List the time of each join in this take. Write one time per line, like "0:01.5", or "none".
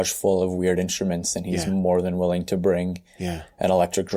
none

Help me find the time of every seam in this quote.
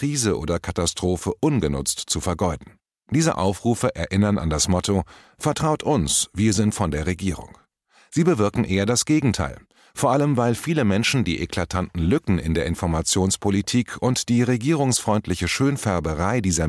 0:02.9

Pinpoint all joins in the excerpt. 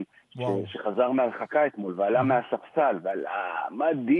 none

